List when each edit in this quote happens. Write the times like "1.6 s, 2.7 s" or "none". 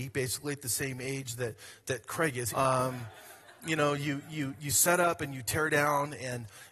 2.5 s